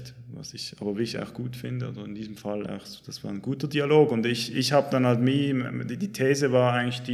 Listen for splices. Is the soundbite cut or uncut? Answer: uncut